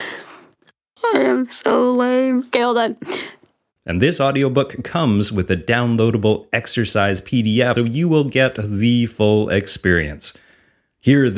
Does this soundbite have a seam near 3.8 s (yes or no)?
yes